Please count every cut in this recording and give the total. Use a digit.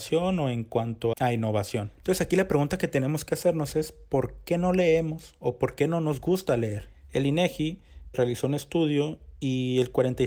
2